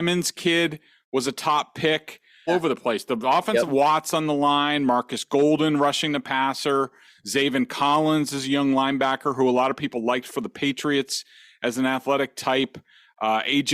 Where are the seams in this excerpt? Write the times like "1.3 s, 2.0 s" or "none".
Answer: 2.5 s, 3.7 s